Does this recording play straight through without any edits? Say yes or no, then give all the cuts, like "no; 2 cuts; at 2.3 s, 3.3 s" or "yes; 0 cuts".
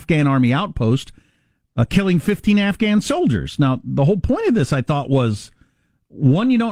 yes; 0 cuts